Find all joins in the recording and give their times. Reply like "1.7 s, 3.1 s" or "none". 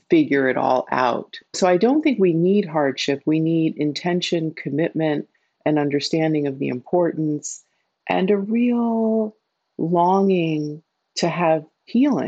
none